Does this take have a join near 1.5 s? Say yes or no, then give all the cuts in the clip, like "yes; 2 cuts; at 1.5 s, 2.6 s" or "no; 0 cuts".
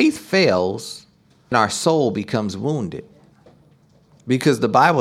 yes; 1 cut; at 1.5 s